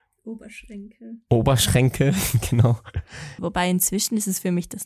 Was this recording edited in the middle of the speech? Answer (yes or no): yes